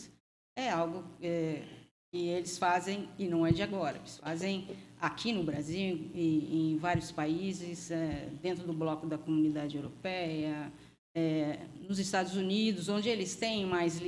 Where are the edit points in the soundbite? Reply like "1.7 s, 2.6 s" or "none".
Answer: none